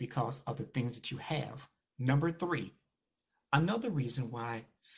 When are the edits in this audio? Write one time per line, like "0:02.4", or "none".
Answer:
0:01.8